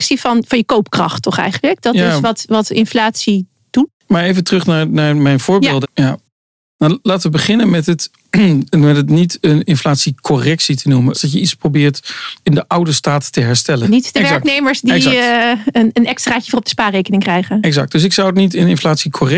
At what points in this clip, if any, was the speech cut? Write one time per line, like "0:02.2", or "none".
0:05.8
0:11.1
0:13.8